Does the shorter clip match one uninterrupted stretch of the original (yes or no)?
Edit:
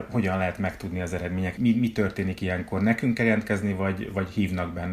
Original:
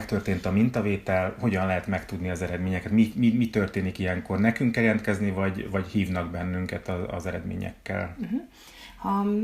no